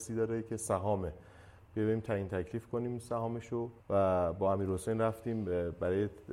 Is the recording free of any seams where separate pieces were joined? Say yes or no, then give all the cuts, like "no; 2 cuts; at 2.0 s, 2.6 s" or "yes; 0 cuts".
no; 1 cut; at 3.8 s